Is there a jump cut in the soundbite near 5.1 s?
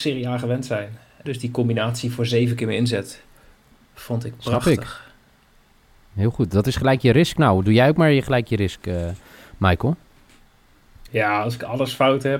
no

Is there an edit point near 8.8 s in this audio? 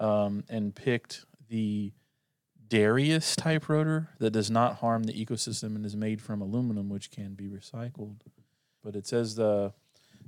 yes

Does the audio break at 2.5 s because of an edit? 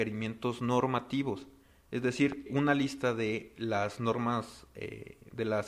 yes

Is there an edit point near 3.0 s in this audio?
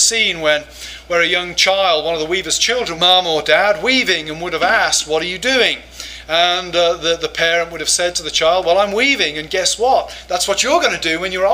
yes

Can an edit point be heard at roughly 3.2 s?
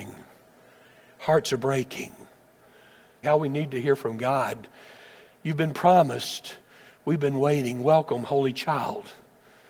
yes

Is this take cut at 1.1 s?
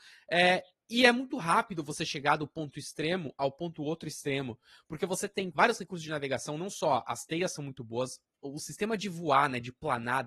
no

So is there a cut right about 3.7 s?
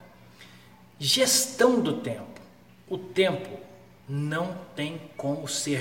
no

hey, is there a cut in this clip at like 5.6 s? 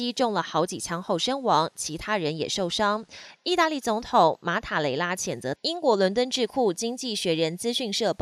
yes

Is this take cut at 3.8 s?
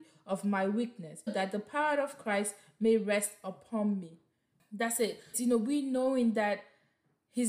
no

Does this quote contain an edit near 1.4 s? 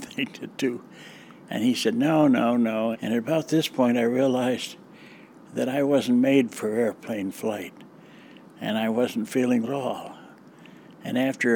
no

